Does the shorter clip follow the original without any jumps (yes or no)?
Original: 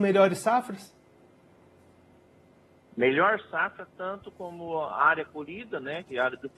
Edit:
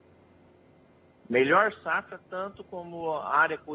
yes